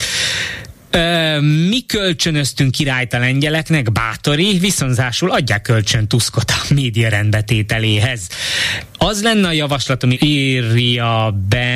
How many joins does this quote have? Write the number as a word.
one